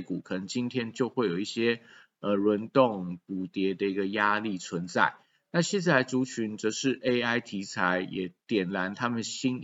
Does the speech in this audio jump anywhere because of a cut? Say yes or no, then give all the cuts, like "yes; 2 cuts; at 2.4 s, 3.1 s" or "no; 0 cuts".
no; 0 cuts